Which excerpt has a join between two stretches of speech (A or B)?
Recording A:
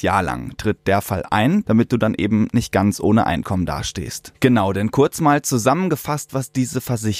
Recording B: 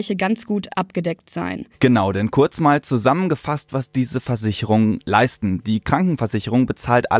A